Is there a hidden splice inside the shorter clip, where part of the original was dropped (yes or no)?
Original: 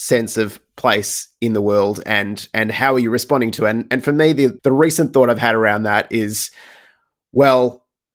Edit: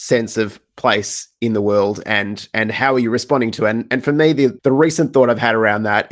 no